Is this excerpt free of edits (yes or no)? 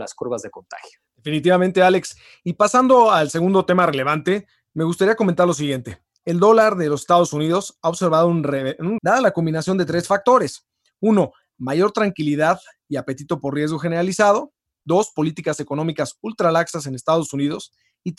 no